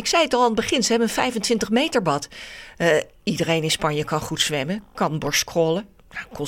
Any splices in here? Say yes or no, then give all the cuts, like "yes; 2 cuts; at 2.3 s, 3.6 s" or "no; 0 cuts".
no; 0 cuts